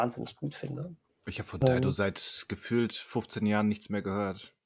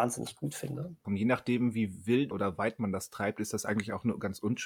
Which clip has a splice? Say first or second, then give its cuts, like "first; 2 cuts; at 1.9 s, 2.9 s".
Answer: second; 2 cuts; at 1.0 s, 2.3 s